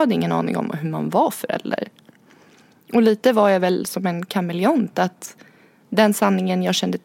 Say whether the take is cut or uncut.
uncut